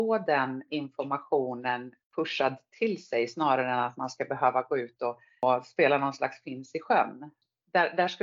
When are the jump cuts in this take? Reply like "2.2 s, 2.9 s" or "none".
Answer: none